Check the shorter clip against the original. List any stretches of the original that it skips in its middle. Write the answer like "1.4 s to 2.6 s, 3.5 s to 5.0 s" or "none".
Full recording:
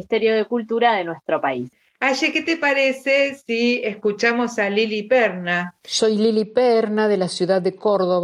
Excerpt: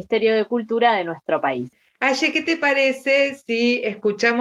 none